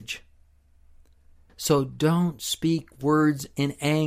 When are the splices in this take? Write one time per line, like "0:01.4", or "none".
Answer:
none